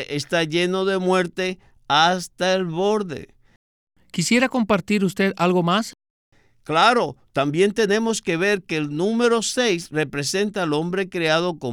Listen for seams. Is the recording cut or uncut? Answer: uncut